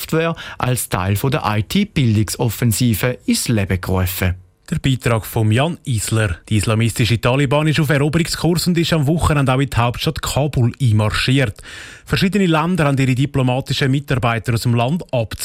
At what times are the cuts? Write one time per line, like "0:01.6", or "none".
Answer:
0:06.4